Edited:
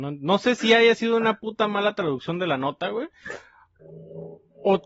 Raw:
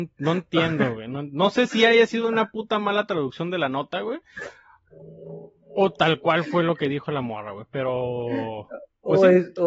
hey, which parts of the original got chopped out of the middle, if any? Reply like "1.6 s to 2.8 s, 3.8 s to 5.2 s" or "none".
none